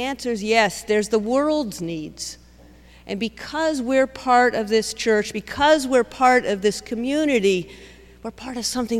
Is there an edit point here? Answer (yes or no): no